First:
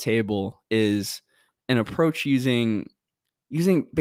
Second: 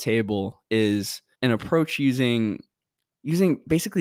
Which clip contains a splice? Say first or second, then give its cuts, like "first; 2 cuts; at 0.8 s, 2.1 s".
second; 1 cut; at 1.3 s